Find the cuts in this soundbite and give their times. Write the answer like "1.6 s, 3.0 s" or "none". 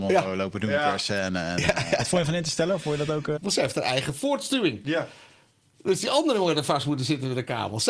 3.4 s